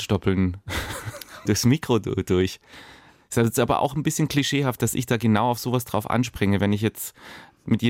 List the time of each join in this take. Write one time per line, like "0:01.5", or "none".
0:01.5